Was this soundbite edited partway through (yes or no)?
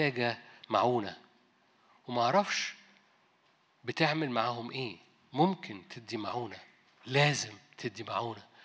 no